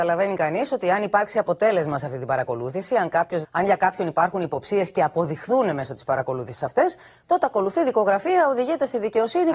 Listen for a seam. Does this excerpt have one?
yes; 1 cut; at 3.4 s

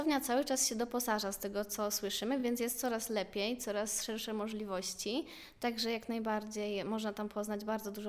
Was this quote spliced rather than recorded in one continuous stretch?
no; 0 cuts

